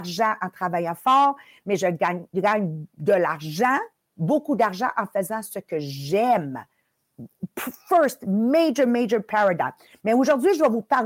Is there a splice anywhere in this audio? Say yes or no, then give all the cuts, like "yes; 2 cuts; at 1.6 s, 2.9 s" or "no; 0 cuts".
no; 0 cuts